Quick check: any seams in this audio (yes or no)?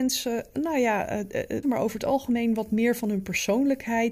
yes